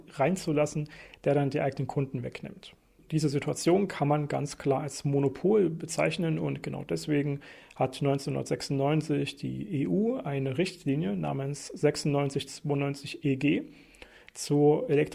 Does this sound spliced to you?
no; 0 cuts

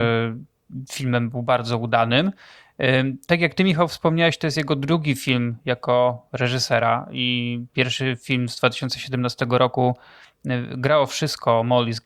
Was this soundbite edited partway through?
no; 0 cuts

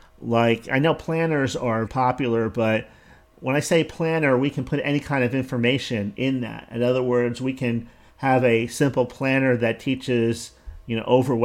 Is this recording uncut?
no; 1 cut; at 1.9 s

